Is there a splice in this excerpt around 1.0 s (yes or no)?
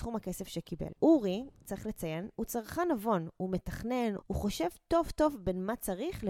yes